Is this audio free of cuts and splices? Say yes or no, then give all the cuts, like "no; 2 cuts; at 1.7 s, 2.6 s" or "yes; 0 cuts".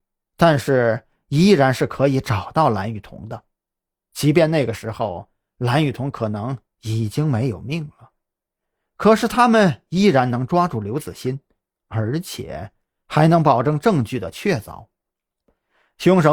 yes; 0 cuts